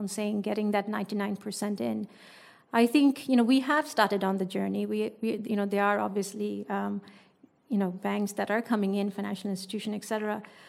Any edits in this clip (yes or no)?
no